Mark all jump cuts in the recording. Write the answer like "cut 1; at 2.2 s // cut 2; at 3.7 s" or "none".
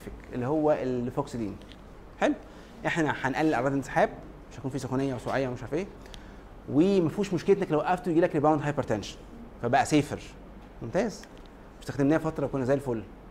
none